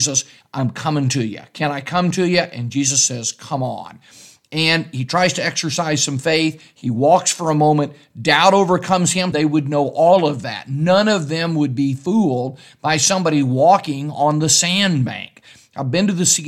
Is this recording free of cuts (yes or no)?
no